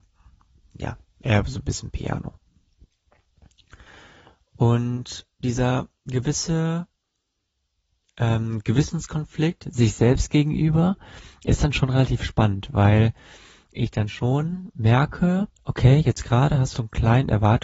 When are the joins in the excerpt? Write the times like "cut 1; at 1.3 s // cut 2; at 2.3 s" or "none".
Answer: cut 1; at 15.5 s // cut 2; at 16.7 s